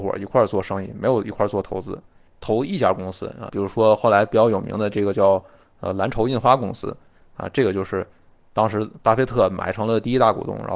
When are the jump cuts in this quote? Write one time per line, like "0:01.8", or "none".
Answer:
0:02.3
0:03.5